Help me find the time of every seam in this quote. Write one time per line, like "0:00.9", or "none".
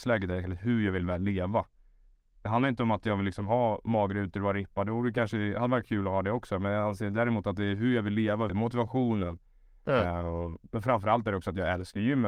0:08.5